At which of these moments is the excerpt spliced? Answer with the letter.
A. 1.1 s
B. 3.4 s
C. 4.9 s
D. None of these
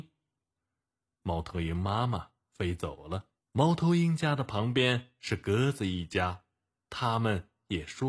B